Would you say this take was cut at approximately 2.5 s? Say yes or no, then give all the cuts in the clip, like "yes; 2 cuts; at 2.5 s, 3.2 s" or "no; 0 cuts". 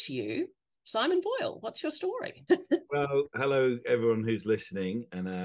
yes; 1 cut; at 2.5 s